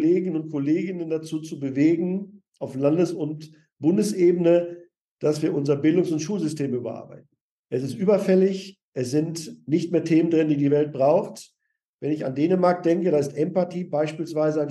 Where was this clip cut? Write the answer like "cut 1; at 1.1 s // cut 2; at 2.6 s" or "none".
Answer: none